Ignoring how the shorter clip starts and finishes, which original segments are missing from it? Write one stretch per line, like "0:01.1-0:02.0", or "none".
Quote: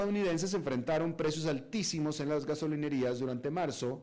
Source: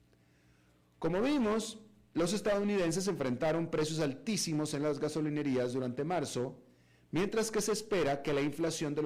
none